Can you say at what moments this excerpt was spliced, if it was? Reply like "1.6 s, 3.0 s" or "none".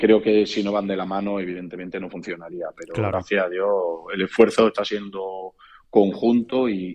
none